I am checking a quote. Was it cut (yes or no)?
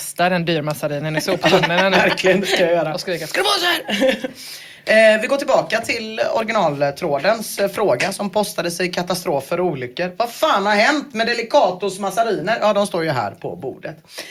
no